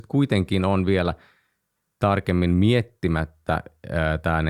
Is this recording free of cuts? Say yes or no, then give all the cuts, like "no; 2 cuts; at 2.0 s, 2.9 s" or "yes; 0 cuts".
yes; 0 cuts